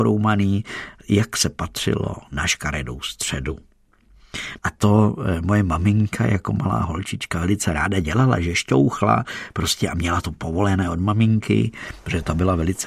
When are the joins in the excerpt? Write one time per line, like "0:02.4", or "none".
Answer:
0:04.6